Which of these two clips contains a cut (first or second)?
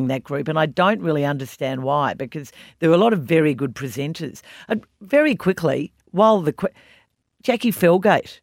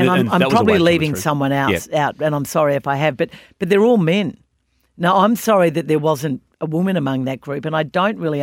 first